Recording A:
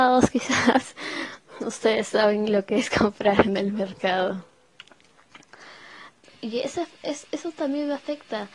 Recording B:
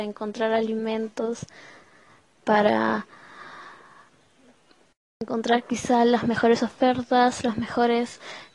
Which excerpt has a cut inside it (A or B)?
A